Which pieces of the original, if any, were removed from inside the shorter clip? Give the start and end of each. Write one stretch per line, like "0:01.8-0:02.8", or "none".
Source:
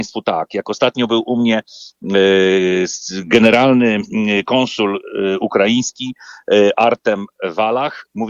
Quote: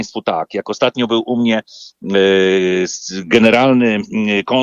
none